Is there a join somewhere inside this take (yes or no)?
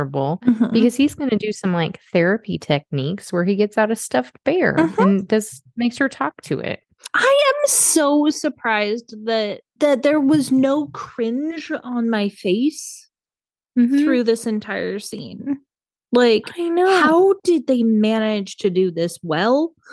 no